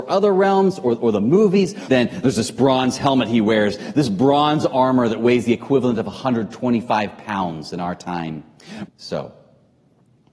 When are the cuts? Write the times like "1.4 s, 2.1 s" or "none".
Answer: 1.8 s, 8.9 s